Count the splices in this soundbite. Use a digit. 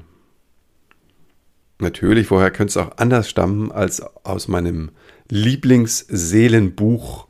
1